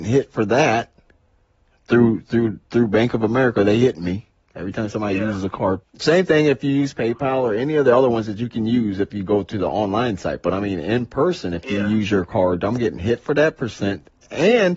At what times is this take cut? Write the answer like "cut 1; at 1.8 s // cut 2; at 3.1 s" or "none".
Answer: cut 1; at 5.8 s